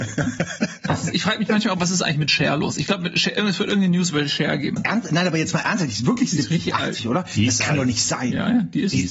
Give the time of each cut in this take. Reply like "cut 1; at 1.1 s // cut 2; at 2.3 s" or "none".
cut 1; at 4.8 s